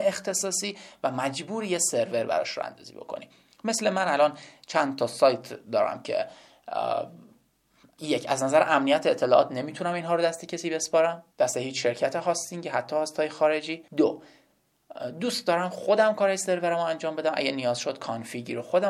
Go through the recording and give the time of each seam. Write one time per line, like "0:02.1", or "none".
0:11.3
0:13.9